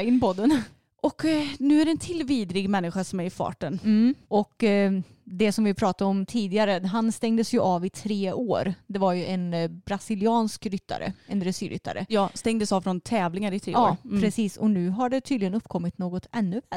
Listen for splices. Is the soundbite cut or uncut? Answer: uncut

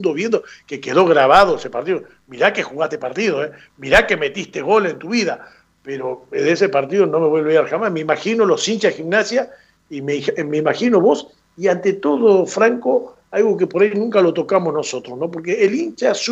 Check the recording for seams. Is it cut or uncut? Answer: uncut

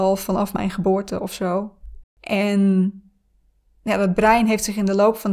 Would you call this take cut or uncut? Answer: cut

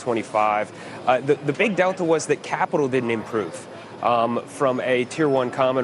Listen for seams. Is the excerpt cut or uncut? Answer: uncut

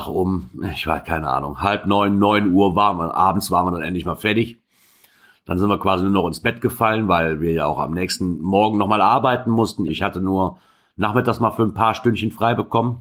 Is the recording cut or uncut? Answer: cut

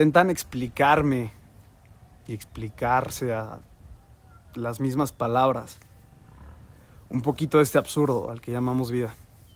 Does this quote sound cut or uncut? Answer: uncut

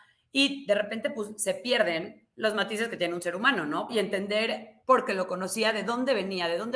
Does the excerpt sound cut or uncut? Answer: cut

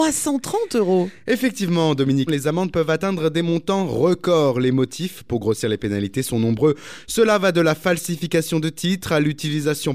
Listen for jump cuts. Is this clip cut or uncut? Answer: cut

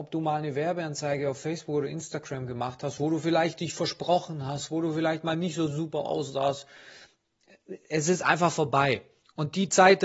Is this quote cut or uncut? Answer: uncut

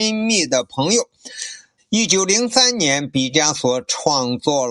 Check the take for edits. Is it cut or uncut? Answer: cut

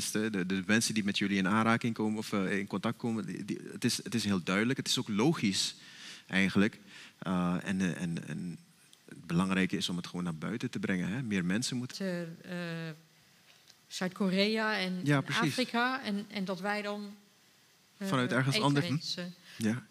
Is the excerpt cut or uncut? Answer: cut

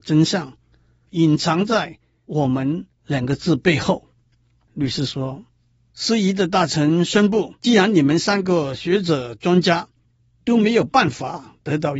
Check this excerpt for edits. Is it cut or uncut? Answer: cut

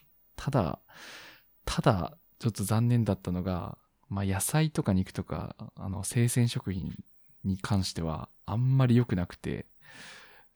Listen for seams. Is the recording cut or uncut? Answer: uncut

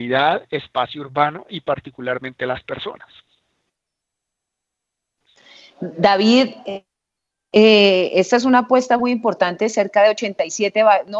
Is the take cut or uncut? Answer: uncut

